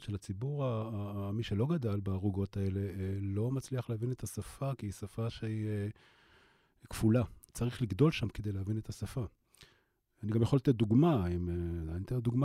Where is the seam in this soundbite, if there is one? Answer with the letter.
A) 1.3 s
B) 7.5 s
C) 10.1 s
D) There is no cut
B